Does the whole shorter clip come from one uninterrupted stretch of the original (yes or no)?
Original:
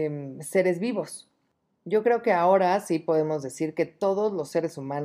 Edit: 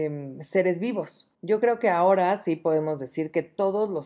no